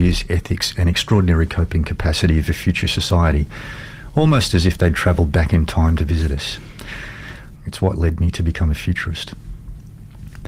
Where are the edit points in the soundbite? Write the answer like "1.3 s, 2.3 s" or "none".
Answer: 7.6 s